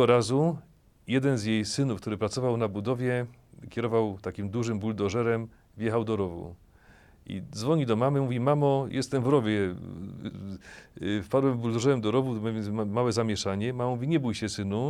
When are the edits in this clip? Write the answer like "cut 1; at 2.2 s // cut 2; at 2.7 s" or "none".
none